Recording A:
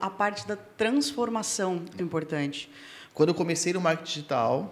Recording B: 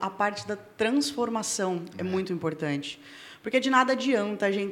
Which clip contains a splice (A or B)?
A